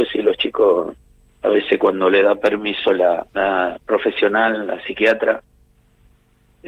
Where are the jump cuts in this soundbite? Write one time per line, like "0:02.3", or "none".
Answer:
0:03.3